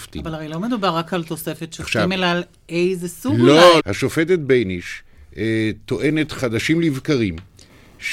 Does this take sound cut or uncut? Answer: cut